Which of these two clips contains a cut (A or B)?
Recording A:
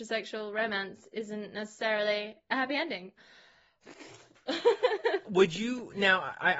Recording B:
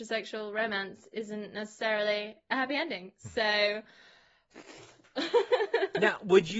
A